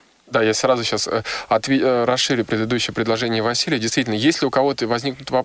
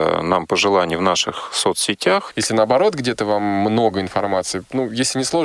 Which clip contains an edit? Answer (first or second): second